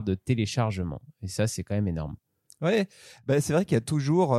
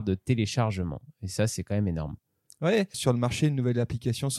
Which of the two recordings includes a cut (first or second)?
second